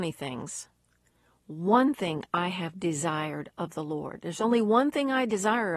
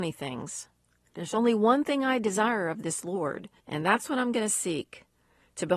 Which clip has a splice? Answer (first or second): second